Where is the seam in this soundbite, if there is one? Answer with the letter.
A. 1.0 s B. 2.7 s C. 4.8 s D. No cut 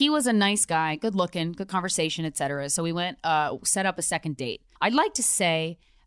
C